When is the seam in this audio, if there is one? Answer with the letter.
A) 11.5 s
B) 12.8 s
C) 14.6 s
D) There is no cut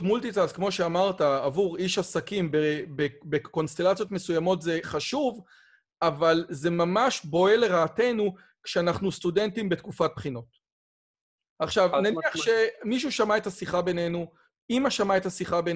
A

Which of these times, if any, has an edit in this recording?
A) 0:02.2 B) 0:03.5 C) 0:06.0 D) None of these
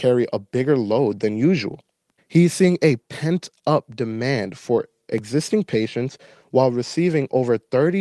A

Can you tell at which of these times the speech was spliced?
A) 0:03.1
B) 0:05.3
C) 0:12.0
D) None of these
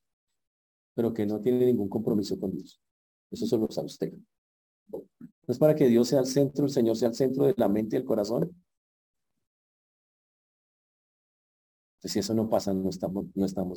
B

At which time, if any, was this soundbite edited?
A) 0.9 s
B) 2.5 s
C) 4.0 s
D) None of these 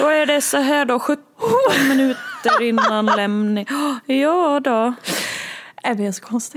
D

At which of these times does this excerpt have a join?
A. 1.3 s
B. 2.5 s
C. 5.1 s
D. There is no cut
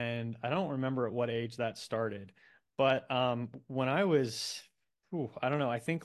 D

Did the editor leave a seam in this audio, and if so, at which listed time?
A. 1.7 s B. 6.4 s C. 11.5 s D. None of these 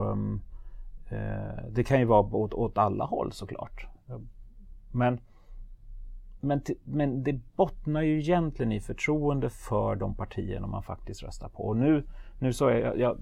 D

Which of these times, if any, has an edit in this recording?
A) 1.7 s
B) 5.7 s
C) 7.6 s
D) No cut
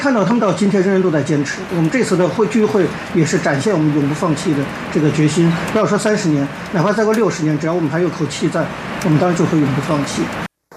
A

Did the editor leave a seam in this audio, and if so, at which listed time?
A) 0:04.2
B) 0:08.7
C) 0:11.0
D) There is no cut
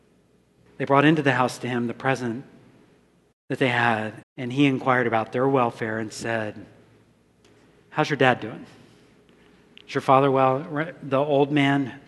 A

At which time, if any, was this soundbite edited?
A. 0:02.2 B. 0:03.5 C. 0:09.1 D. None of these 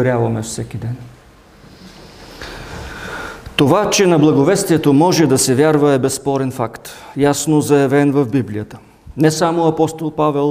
D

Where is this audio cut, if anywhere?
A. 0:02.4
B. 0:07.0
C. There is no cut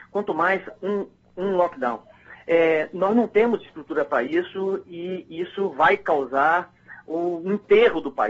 C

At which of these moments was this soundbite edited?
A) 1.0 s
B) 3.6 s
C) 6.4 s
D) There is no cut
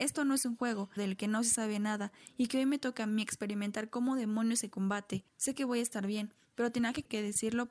A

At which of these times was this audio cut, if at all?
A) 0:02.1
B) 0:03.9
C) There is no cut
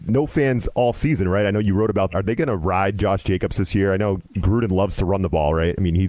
A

